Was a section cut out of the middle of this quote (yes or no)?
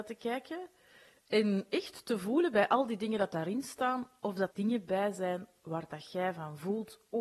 yes